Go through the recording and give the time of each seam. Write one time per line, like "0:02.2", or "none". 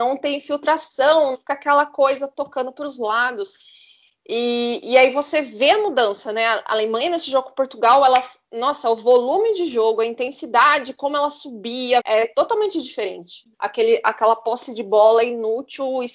0:01.3
0:12.0
0:13.5